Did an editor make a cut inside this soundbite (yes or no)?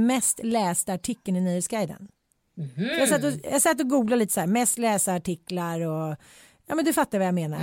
no